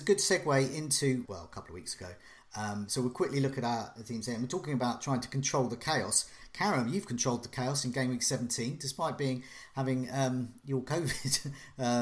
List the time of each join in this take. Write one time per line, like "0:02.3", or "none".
0:01.2